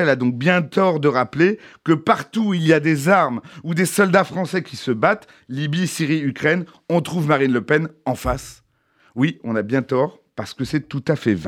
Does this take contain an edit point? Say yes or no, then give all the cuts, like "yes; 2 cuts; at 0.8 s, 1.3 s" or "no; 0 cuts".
no; 0 cuts